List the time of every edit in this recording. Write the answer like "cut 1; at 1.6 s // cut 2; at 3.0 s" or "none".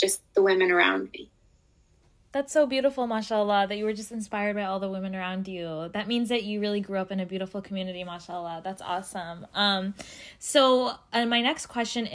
none